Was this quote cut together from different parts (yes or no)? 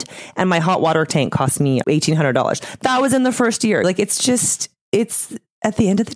yes